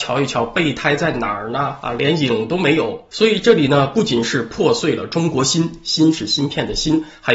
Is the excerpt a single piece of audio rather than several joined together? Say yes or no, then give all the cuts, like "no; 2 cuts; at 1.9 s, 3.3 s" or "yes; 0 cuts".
no; 1 cut; at 3.1 s